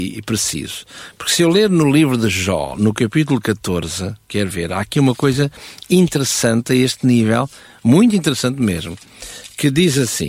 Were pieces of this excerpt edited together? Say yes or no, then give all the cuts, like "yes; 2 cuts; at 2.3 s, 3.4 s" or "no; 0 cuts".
no; 0 cuts